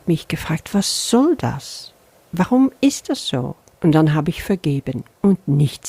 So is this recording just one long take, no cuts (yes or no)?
yes